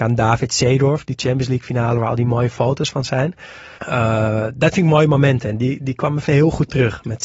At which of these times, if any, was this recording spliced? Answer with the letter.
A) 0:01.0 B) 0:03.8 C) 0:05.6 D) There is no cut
B